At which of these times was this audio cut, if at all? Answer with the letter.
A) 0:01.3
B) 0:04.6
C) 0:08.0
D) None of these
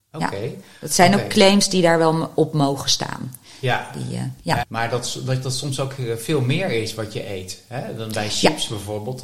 B